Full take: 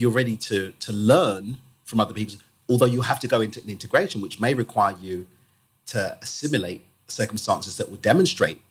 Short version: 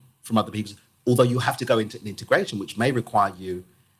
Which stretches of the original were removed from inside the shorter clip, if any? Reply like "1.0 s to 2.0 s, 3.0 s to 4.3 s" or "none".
none